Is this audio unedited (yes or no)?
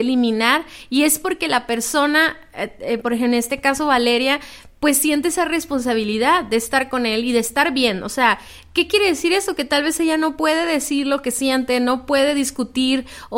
yes